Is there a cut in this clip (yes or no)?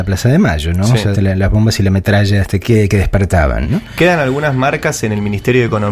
yes